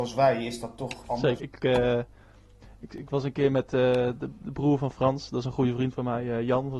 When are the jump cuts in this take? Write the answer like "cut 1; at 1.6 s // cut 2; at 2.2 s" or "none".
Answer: cut 1; at 1.4 s